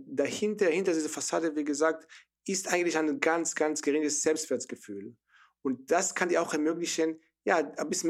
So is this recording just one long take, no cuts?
yes; 0 cuts

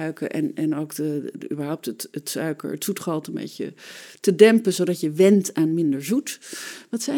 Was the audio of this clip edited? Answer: no; 0 cuts

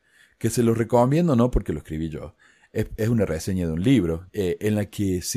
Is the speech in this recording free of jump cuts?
no; 1 cut; at 4.3 s

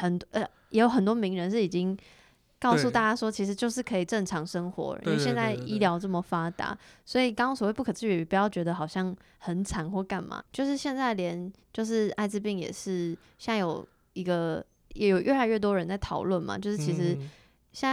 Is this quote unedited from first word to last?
no; 1 cut; at 10.4 s

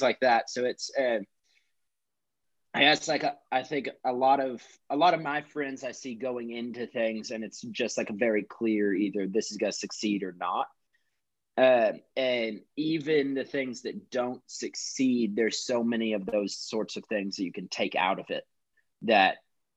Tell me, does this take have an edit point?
no; 0 cuts

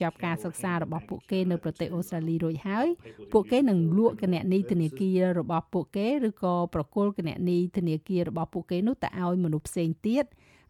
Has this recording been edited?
no; 0 cuts

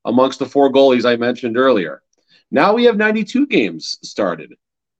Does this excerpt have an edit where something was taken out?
no; 0 cuts

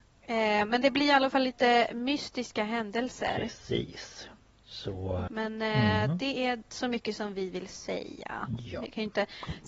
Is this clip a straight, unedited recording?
no; 1 cut; at 5.3 s

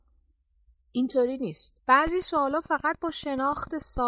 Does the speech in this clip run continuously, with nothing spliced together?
no; 1 cut; at 1.8 s

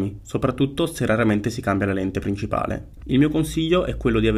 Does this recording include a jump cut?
yes; 1 cut; at 3.0 s

